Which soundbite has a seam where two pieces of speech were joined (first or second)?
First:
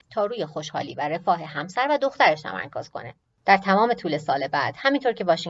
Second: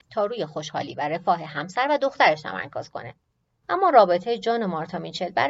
first